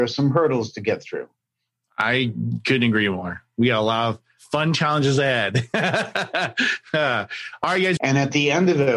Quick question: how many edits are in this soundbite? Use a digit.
1